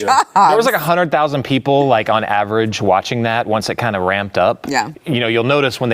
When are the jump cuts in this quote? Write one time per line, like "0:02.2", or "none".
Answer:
0:04.9